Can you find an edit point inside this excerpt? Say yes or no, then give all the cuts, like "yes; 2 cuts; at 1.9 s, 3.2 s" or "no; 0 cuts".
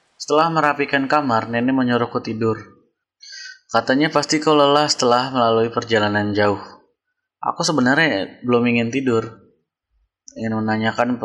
no; 0 cuts